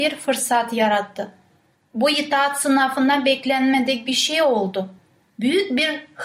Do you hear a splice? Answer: yes; 1 cut; at 5.2 s

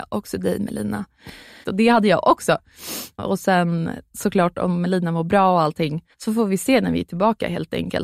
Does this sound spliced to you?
yes; 3 cuts; at 1.6 s, 3.2 s, 6.1 s

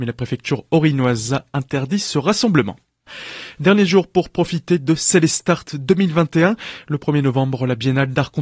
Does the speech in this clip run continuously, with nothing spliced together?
yes; 0 cuts

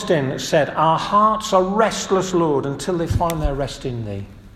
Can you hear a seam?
no; 0 cuts

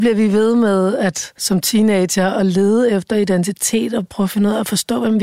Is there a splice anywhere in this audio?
yes; 1 cut; at 1.4 s

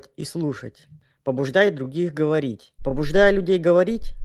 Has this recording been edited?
yes; 1 cut; at 2.8 s

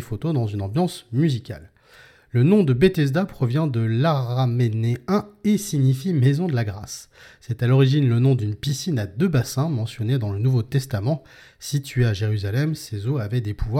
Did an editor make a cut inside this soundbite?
no; 0 cuts

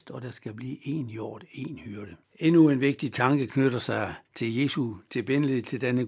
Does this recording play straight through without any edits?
no; 2 cuts; at 2.2 s, 4.3 s

